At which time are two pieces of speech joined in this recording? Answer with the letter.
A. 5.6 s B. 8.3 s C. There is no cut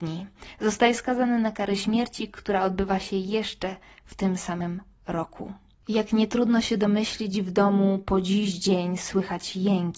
C